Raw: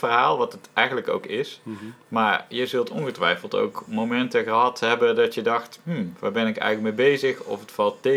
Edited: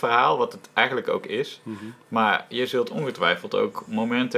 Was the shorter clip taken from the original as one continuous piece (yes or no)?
yes